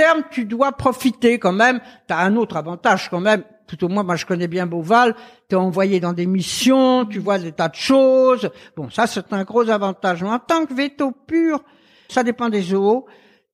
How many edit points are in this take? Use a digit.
1